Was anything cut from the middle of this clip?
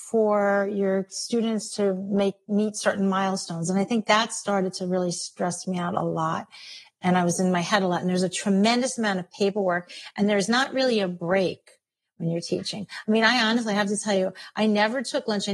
no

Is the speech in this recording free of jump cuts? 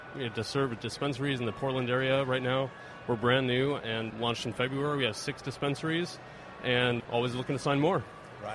no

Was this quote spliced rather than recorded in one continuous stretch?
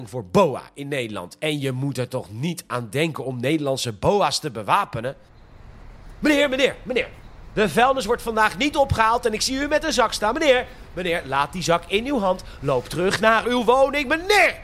no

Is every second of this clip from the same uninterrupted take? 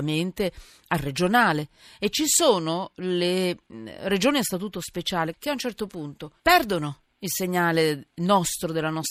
no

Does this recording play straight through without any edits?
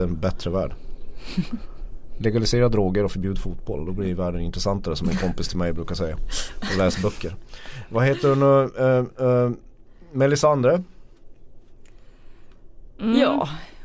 yes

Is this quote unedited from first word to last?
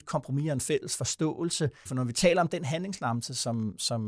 no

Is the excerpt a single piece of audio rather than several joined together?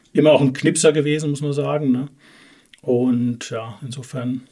yes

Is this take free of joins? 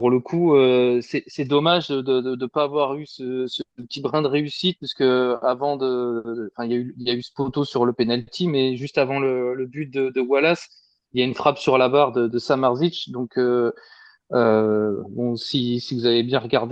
yes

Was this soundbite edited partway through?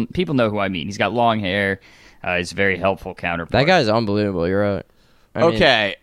no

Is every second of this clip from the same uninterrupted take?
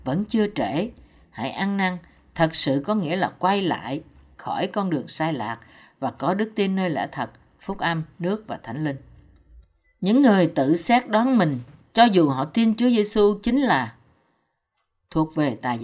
yes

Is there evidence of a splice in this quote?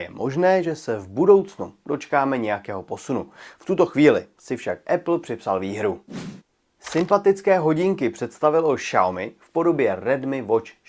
no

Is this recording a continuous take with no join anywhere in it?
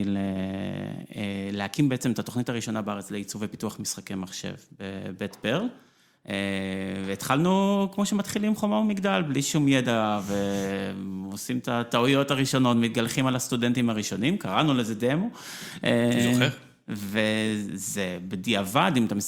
yes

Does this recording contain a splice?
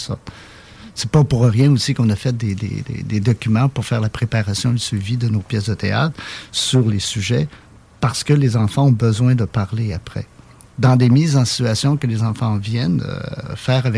no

